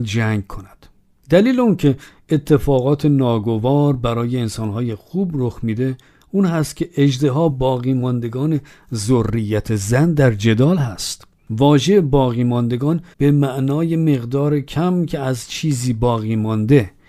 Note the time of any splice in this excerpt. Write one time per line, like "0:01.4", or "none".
0:07.5
0:13.1